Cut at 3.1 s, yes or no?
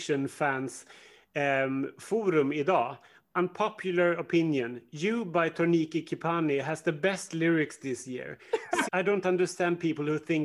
no